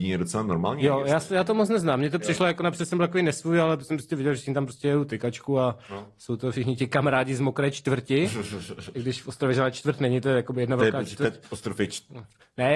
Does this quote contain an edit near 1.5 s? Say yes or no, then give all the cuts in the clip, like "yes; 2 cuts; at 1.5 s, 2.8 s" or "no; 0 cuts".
no; 0 cuts